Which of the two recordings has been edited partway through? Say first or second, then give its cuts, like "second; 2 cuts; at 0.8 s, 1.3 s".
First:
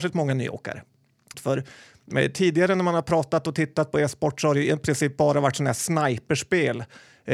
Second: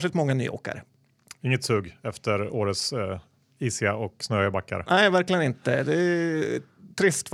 first; 1 cut; at 1.3 s